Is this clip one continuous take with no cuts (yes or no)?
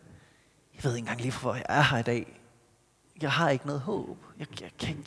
yes